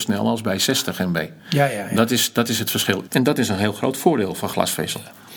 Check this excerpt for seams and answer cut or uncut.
cut